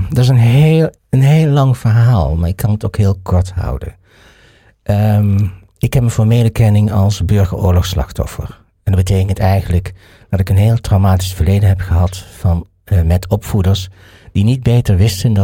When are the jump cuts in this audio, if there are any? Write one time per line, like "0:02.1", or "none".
0:01.0